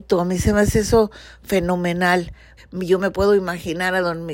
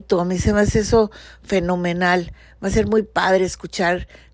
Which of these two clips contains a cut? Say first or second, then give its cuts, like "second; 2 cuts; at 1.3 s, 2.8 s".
first; 1 cut; at 2.6 s